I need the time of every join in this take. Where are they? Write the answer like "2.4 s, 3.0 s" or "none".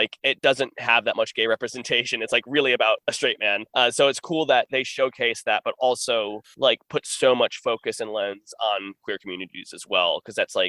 none